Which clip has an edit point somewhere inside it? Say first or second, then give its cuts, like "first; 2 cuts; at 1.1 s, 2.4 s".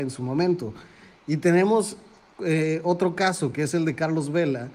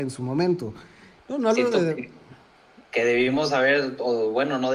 second; 2 cuts; at 1.2 s, 2.8 s